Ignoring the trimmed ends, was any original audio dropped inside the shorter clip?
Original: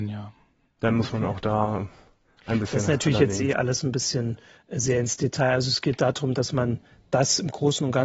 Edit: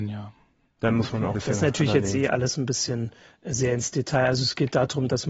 yes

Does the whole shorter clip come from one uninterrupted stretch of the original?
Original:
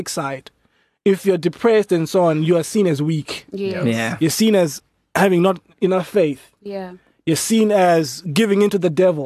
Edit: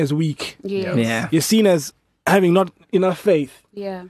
yes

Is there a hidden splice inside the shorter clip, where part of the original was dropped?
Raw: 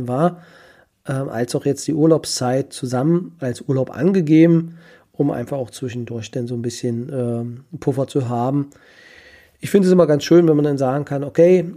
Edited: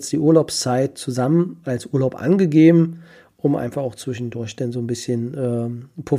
no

